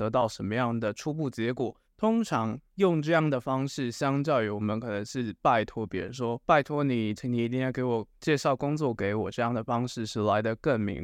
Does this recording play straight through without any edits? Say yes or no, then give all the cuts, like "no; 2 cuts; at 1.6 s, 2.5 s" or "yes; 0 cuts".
no; 2 cuts; at 1.8 s, 7.2 s